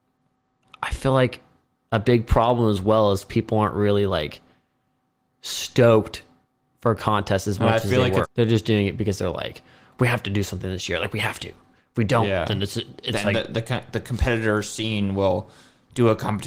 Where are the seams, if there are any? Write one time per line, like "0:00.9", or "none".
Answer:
0:08.2